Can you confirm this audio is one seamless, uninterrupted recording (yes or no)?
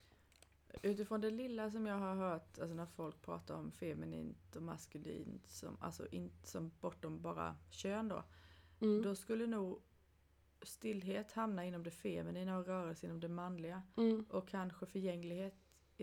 yes